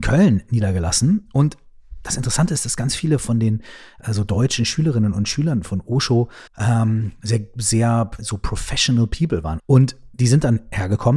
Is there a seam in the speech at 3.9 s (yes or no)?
no